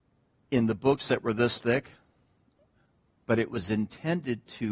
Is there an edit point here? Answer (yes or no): yes